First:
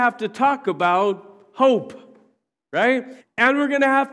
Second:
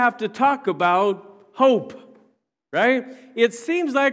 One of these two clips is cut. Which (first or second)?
first